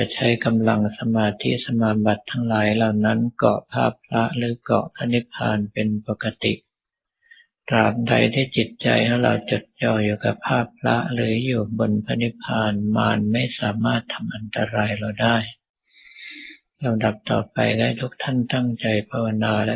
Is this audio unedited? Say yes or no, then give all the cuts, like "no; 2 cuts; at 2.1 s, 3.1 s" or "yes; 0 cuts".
yes; 0 cuts